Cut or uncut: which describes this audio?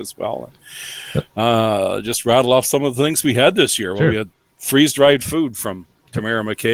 uncut